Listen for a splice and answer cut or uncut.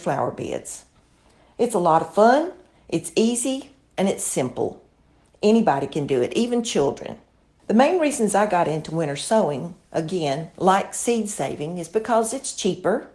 uncut